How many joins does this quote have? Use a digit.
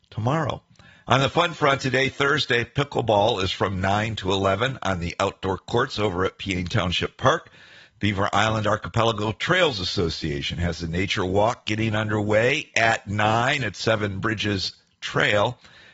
0